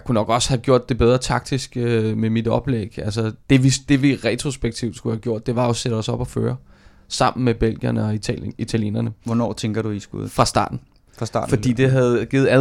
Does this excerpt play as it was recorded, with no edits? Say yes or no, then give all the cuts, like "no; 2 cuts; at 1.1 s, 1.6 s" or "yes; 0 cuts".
yes; 0 cuts